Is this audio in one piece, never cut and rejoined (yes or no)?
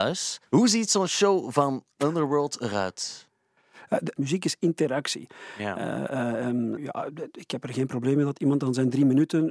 no